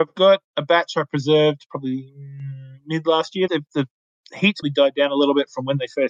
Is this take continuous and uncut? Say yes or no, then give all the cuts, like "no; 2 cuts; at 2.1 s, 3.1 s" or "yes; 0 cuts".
no; 2 cuts; at 3.5 s, 4.6 s